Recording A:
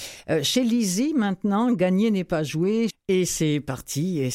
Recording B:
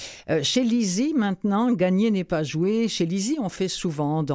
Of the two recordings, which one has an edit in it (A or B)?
A